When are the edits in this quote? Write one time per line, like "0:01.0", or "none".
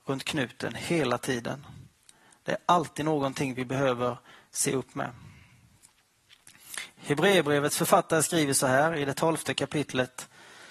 none